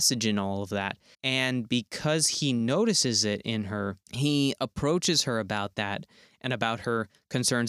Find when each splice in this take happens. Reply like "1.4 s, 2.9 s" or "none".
1.1 s, 4.0 s